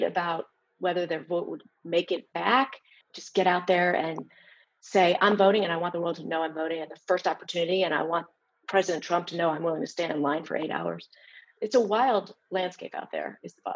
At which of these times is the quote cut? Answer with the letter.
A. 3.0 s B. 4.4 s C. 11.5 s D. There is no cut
A